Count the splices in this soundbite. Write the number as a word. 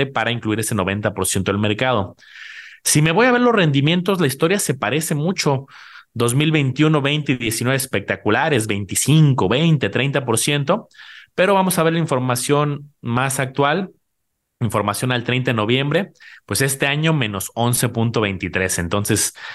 zero